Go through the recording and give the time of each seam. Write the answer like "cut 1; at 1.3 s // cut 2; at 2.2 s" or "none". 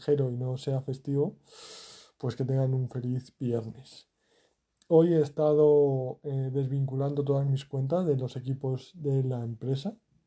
none

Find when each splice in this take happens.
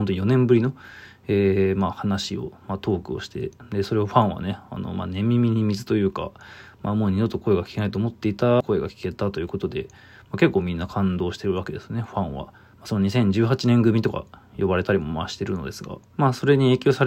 cut 1; at 16.0 s

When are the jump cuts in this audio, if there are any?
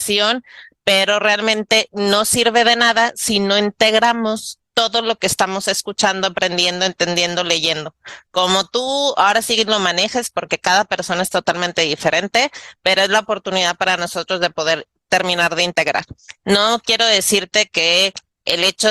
cut 1; at 16.4 s

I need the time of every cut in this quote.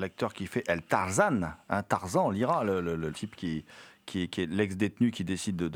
cut 1; at 3.1 s

